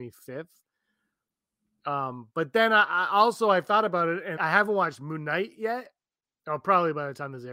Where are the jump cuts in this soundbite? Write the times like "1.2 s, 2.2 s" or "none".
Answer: 4.4 s

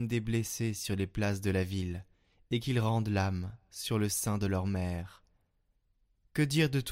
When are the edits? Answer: none

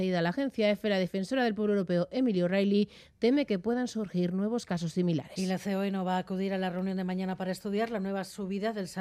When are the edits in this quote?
none

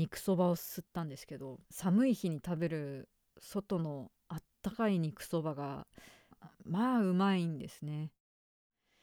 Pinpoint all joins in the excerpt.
1.7 s, 4.2 s

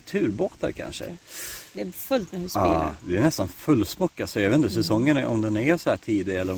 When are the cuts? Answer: 1.1 s

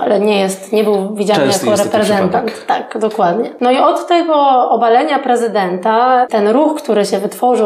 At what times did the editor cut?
none

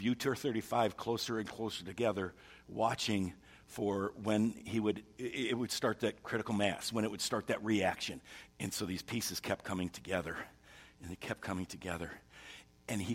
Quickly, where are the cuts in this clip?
8.5 s

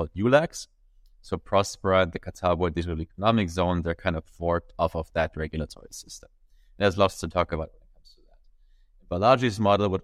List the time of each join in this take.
none

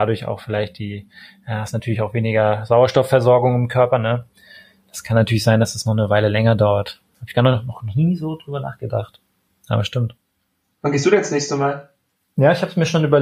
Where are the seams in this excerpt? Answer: none

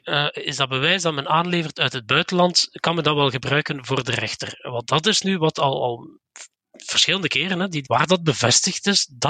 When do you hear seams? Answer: 7.8 s

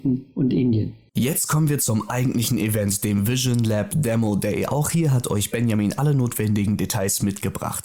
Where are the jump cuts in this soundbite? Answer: 1.1 s

